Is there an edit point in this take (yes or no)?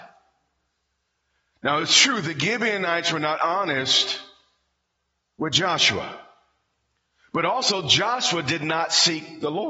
no